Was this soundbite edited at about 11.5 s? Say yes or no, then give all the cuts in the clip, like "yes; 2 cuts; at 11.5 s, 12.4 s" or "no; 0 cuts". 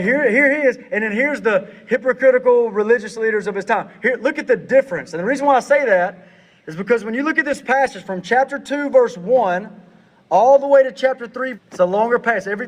yes; 1 cut; at 11.5 s